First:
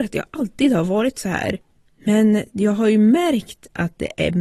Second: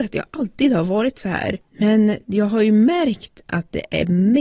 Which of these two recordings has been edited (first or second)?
second